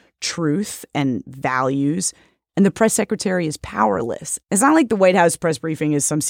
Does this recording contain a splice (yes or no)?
yes